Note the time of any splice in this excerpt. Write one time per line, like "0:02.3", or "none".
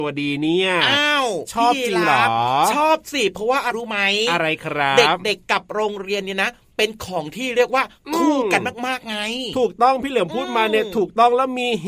0:03.7

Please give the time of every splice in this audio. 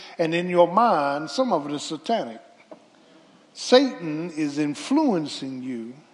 none

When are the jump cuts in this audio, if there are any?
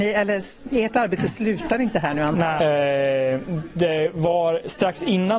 0:02.6

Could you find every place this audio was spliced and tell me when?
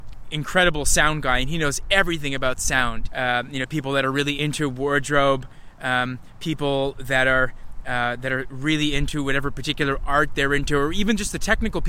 0:03.1
0:04.4

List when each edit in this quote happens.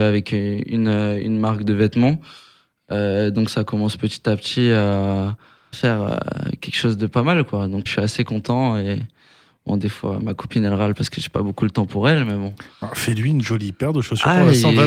0:05.7
0:07.9

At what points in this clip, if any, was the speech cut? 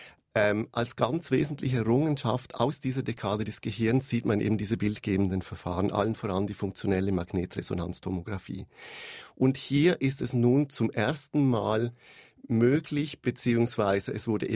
none

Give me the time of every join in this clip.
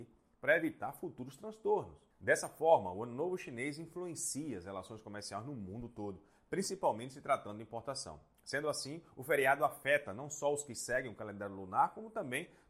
0:02.1

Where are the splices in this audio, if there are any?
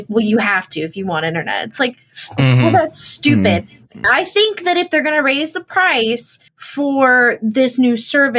0:04.0
0:06.5

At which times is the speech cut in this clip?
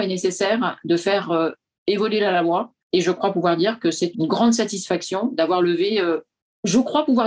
0:02.8
0:04.1

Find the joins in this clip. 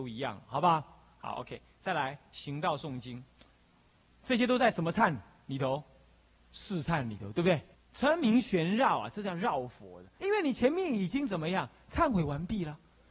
0:07.7
0:10.2

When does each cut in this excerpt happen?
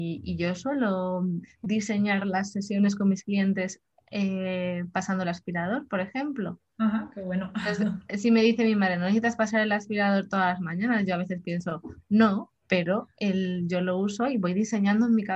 none

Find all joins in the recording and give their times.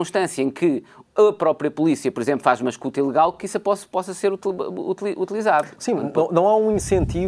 none

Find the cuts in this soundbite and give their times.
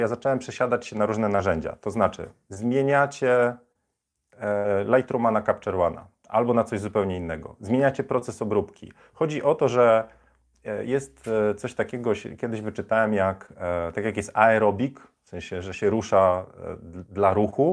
none

